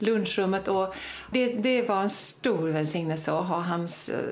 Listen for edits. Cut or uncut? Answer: cut